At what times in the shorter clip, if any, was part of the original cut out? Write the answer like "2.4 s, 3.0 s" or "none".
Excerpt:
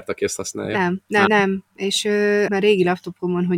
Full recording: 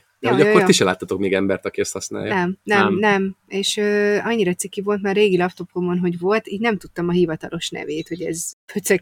1.3 s, 2.5 s